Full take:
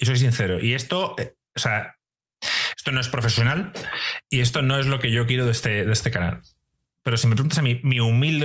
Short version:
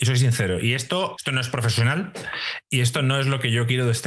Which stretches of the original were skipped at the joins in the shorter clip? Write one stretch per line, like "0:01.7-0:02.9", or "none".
0:01.2-0:02.8